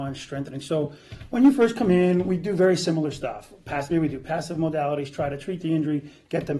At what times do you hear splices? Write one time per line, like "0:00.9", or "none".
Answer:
0:03.9

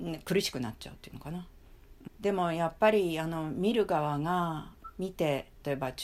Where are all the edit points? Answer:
0:02.1

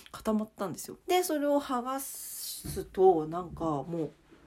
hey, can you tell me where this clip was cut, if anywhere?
0:01.0

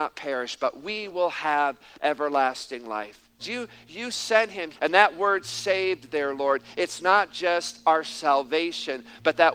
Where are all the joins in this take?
0:03.4
0:04.7

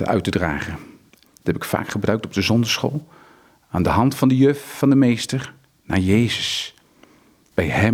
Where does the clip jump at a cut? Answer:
0:01.2

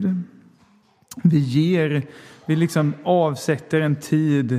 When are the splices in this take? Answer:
none

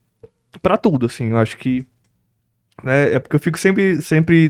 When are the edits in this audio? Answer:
none

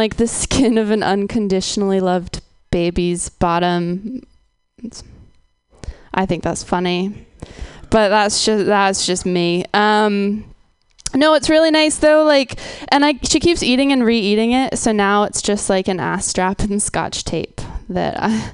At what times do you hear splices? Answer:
none

